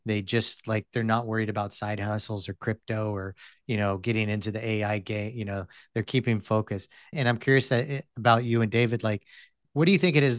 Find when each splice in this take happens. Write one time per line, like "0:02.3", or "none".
0:07.1